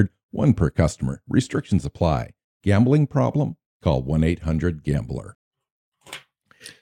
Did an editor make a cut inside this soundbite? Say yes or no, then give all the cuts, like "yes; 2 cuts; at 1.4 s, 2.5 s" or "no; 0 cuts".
yes; 1 cut; at 2.4 s